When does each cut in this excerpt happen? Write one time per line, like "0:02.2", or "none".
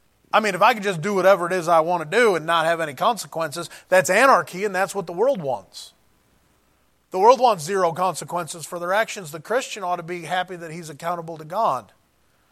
none